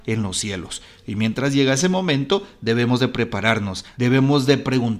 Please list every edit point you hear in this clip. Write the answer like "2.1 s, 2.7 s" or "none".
3.9 s